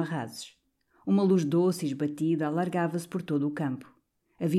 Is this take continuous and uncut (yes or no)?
yes